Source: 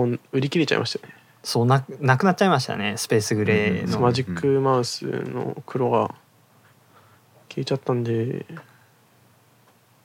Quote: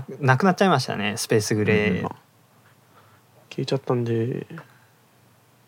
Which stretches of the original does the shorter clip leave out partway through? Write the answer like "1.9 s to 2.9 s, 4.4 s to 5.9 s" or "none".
3.8 s to 6.0 s